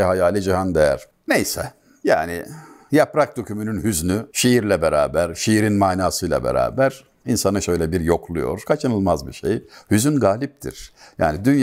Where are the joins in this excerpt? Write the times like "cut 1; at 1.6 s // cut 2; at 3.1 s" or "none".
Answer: none